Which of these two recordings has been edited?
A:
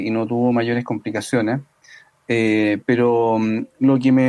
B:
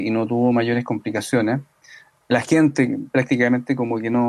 B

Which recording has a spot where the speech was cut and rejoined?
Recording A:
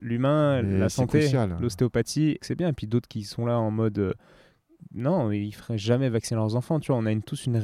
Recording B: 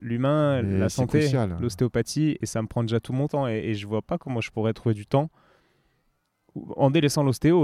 A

